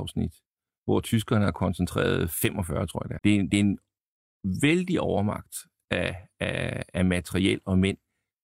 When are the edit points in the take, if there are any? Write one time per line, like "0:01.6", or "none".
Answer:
0:03.2